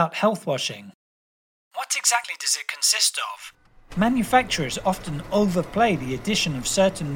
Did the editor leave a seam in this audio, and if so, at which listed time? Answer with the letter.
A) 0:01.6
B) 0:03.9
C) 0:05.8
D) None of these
B